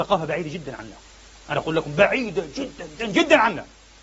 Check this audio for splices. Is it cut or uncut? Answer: cut